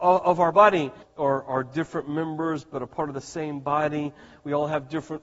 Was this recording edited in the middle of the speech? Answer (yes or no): yes